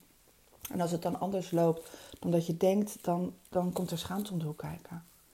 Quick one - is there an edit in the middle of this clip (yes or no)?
no